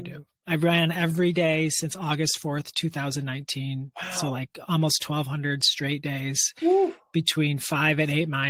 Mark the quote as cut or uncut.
uncut